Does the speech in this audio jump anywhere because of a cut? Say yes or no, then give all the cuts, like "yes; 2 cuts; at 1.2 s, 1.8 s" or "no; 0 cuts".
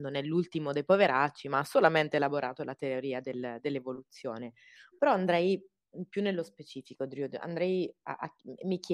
no; 0 cuts